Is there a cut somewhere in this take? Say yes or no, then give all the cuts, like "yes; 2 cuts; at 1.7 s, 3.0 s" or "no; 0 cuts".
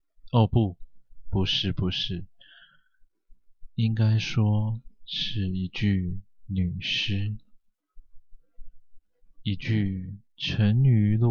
yes; 1 cut; at 1.2 s